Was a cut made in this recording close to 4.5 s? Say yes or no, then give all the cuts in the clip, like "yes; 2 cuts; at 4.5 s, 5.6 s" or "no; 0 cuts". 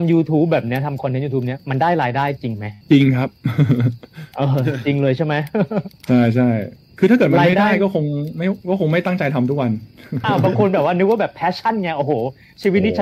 no; 2 cuts; at 2.8 s, 10.2 s